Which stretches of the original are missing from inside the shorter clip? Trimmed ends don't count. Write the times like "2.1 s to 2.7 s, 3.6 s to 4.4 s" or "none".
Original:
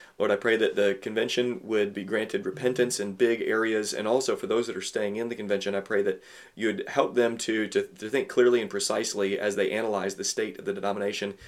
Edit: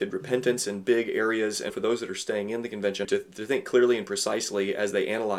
4.0 s to 4.4 s, 5.7 s to 7.7 s

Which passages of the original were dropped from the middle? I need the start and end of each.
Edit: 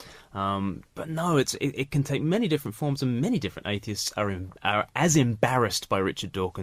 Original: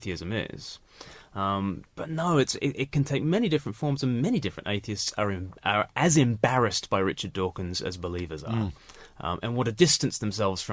none

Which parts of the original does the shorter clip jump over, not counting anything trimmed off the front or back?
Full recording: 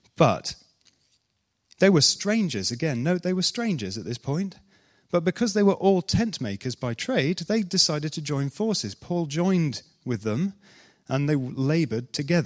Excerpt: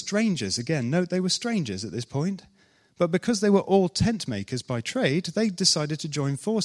none

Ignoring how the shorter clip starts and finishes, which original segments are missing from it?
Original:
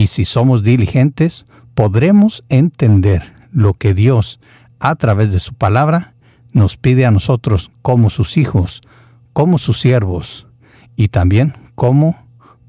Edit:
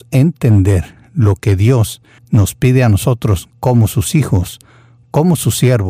4.6 s to 6.4 s

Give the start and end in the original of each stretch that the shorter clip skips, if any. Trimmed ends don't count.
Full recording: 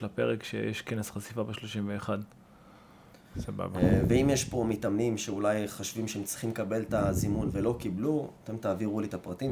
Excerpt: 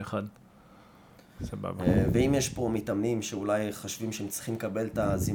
none

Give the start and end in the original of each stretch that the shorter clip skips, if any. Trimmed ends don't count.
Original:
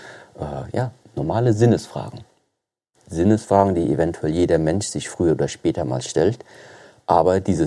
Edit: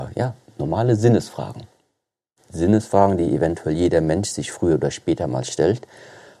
none

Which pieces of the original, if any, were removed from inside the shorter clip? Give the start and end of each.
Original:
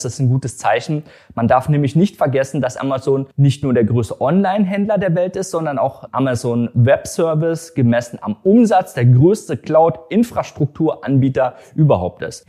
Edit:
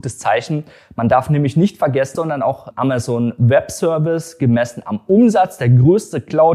2.5 s to 5.5 s

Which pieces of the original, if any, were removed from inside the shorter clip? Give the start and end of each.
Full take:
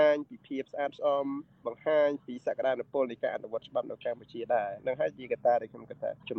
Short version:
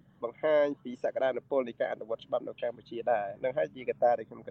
none

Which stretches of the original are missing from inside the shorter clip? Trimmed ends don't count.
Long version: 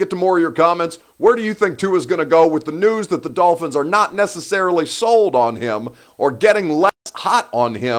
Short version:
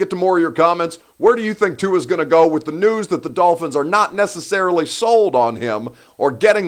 none

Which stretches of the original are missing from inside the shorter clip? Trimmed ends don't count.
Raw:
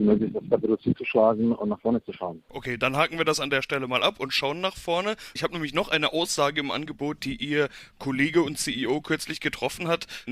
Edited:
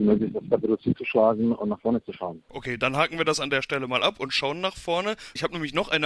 none

